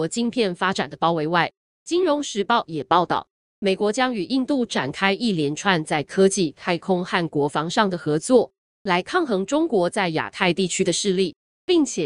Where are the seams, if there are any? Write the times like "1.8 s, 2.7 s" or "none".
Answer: none